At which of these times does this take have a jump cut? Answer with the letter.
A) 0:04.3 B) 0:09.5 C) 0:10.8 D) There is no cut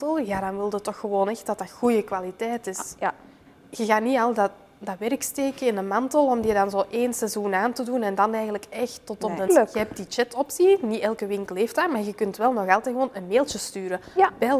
B